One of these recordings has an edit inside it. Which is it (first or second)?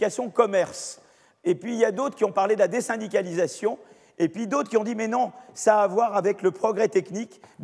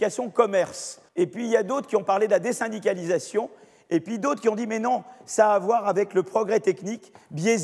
second